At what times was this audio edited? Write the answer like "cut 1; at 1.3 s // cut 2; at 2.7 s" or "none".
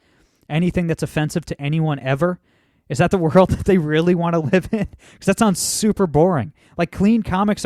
none